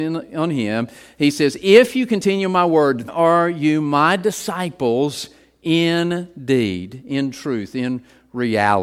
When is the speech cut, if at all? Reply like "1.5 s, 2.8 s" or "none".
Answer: 3.1 s